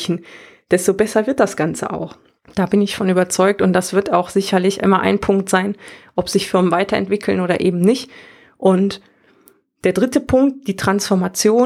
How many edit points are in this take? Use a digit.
0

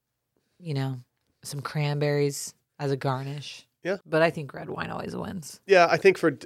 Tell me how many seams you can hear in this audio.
1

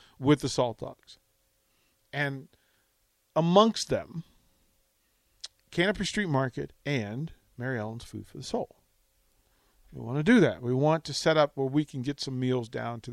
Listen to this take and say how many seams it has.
0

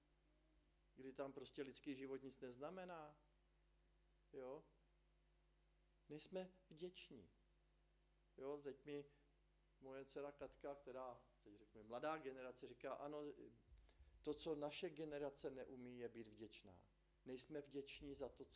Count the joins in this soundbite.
1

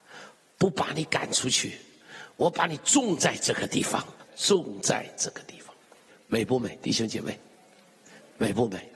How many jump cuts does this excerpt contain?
1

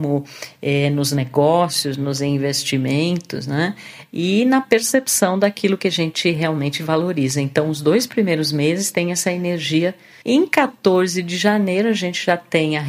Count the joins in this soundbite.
1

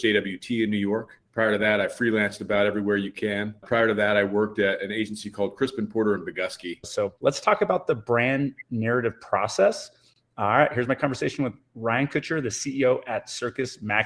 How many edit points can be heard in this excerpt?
1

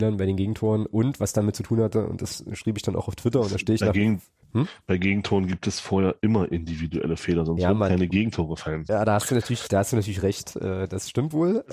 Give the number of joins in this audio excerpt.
0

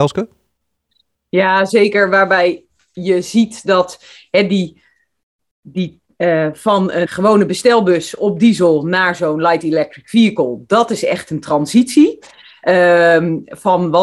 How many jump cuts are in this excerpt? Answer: 1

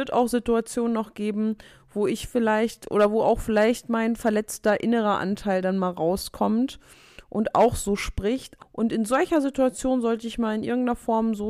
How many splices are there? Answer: 1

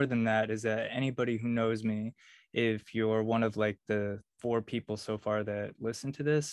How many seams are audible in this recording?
0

